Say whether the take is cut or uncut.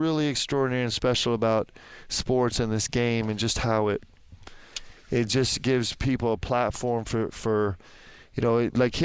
uncut